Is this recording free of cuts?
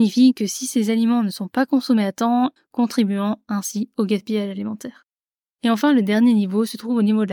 no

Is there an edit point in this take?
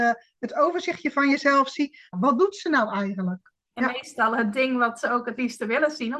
yes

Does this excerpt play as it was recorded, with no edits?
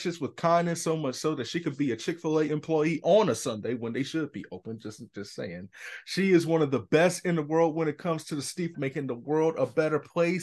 no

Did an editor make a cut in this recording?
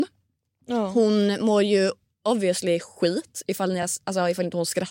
no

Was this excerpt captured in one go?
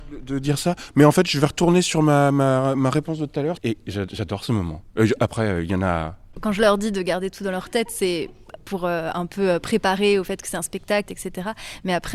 no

